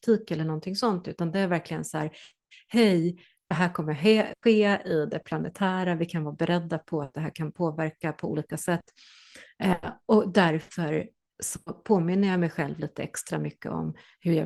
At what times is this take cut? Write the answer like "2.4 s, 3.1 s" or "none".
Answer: none